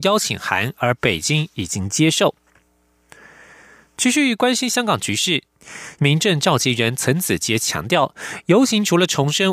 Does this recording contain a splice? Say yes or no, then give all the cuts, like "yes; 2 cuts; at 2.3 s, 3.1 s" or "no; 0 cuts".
yes; 1 cut; at 6.0 s